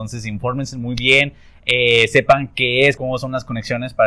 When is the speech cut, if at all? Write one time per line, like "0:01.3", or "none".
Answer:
0:03.0